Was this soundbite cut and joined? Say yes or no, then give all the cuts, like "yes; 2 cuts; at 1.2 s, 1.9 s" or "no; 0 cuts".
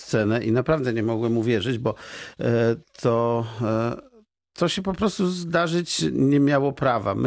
no; 0 cuts